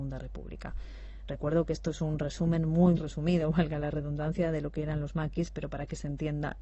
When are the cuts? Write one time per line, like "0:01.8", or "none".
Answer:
0:03.0